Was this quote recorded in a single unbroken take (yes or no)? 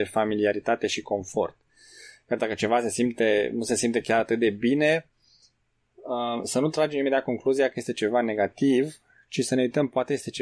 yes